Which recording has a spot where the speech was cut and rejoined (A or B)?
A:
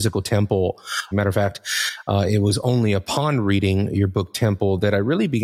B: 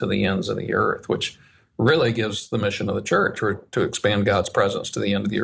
A